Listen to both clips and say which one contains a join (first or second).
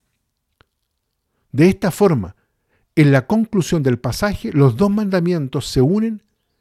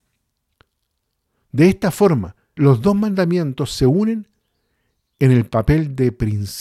second